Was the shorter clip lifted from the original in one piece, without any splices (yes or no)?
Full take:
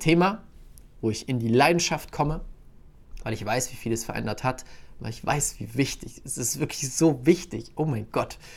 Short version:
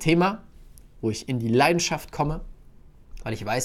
yes